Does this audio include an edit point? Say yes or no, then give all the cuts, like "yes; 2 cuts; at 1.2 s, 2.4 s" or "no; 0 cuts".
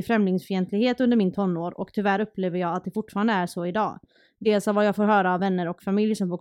no; 0 cuts